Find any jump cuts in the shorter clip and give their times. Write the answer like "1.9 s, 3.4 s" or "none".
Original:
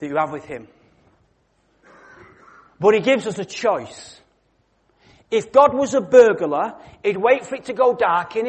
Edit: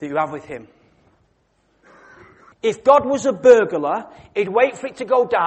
2.5 s